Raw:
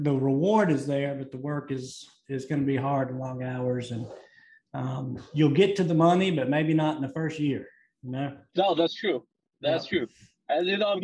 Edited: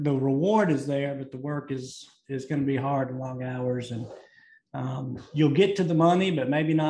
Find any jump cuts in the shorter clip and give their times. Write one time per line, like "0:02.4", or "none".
none